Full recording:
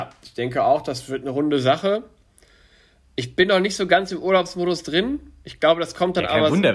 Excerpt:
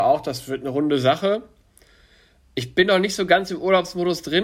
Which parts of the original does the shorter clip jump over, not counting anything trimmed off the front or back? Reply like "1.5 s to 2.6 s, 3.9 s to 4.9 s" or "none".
none